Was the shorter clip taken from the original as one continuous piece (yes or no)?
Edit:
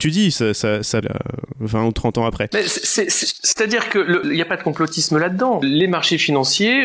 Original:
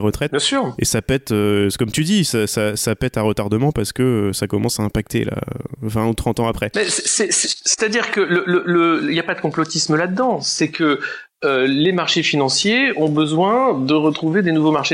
no